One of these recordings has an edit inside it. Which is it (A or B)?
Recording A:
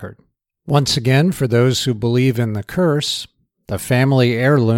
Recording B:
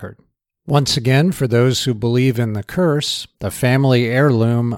B